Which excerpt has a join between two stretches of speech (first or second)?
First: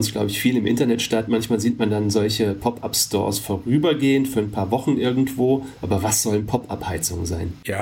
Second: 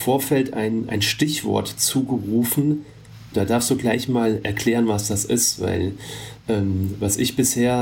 second